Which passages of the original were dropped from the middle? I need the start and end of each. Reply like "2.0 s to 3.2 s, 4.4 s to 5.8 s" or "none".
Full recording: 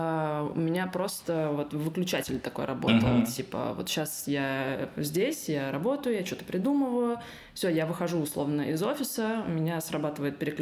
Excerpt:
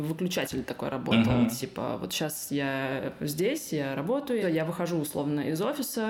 6.2 s to 7.6 s